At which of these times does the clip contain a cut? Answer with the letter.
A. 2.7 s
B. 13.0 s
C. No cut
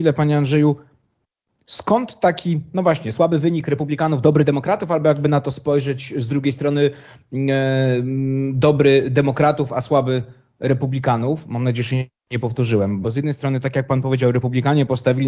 B